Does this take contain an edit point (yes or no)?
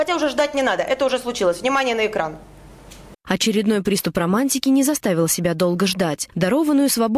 yes